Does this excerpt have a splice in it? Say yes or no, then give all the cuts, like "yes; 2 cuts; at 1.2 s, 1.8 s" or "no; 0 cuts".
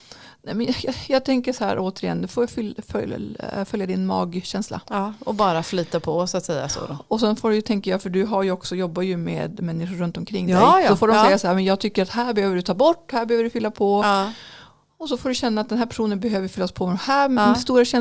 no; 0 cuts